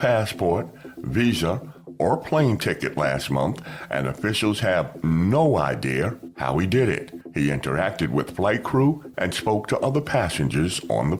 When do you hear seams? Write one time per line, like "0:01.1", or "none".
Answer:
0:09.1